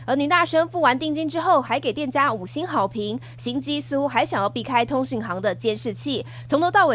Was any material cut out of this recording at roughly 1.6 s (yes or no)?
no